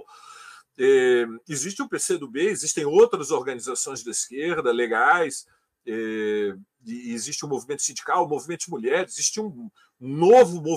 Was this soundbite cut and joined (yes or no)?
no